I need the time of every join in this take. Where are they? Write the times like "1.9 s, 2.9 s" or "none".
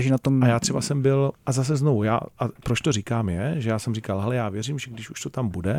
none